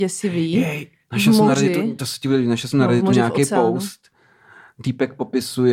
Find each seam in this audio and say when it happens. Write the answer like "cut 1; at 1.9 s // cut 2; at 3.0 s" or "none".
none

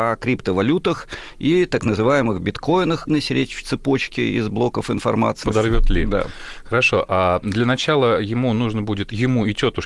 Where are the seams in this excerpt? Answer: cut 1; at 3.1 s // cut 2; at 5.4 s

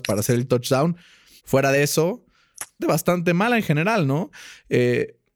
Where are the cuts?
cut 1; at 1.4 s // cut 2; at 2.8 s

